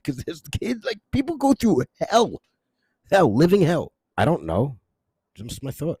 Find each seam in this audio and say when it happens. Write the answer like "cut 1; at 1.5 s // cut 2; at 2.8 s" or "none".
cut 1; at 4.1 s